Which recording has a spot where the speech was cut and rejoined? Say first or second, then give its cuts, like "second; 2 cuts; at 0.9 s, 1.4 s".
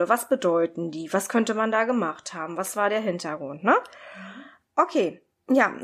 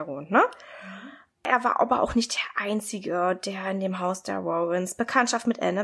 second; 1 cut; at 1.3 s